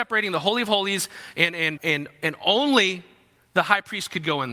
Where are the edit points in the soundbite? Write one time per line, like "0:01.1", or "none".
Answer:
0:01.8